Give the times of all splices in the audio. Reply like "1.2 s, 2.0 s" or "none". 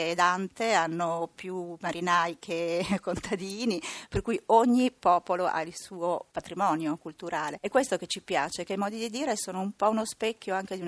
none